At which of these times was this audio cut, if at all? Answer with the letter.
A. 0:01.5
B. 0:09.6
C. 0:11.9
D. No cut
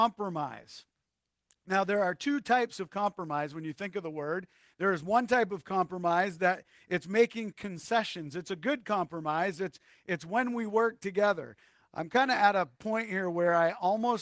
D